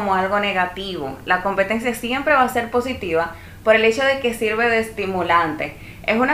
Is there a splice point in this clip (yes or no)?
no